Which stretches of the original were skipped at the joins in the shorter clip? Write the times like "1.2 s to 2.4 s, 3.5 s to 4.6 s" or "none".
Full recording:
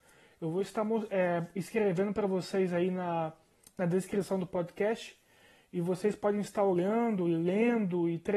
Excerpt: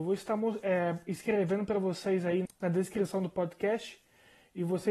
2.9 s to 3.6 s